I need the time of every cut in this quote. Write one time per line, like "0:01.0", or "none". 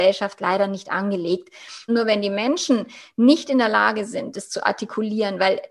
0:01.9